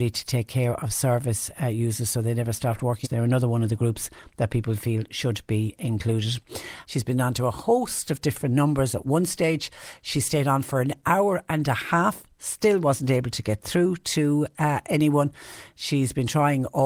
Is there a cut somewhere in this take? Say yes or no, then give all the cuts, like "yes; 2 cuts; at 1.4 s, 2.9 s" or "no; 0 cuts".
yes; 2 cuts; at 3.0 s, 6.8 s